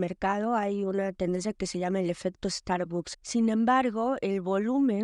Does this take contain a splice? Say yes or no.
yes